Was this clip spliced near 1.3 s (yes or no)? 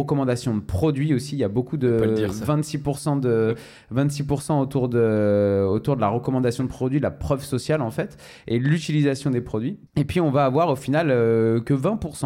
no